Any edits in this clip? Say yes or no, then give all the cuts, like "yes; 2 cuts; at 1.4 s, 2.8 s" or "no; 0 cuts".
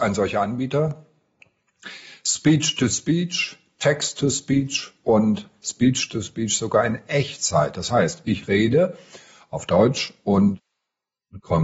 no; 0 cuts